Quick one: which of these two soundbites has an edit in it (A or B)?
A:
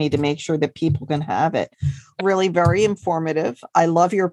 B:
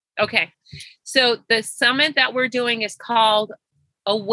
A